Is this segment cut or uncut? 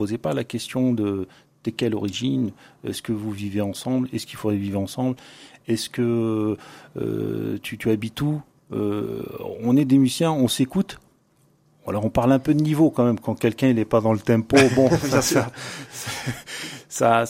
uncut